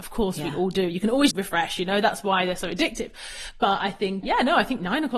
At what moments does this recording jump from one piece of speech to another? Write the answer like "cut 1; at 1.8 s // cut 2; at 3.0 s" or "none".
cut 1; at 1.3 s // cut 2; at 4.2 s